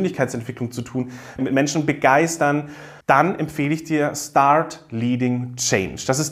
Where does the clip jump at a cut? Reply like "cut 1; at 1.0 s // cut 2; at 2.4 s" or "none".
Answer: cut 1; at 1.4 s // cut 2; at 3.0 s